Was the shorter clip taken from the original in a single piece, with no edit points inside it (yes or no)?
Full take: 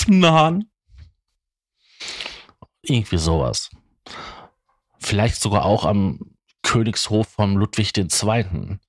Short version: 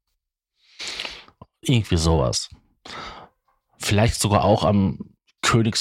yes